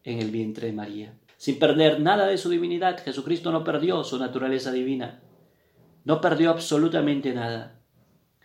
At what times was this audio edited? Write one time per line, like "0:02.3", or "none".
0:01.3